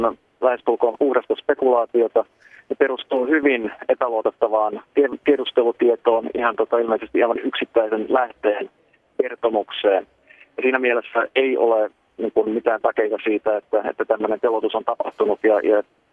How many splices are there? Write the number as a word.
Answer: one